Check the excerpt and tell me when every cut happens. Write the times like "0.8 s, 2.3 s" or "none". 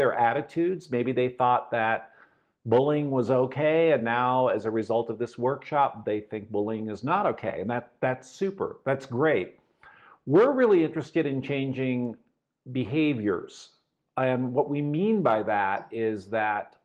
none